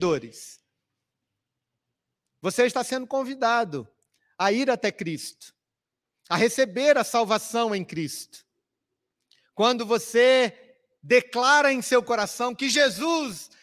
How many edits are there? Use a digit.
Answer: 0